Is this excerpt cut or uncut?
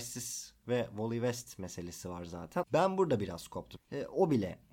cut